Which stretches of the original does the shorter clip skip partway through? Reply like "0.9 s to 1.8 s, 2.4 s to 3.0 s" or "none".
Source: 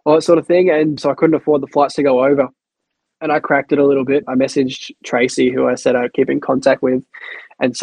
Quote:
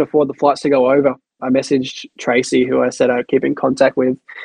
2.7 s to 4.2 s